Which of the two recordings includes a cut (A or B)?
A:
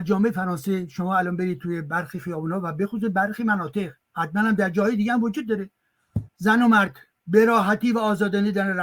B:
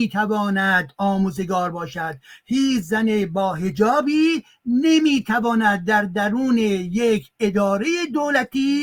A